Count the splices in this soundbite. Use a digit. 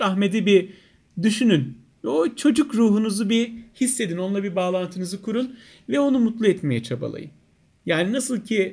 0